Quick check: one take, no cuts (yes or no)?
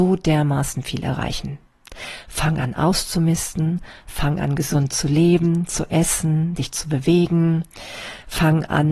yes